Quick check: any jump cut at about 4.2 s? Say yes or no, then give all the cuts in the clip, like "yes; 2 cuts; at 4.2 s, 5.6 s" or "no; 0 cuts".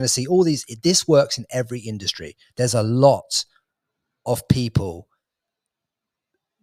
no; 1 cut; at 2.5 s